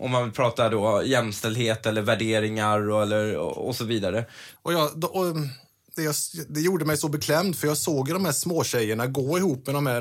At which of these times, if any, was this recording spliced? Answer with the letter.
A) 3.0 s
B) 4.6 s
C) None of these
B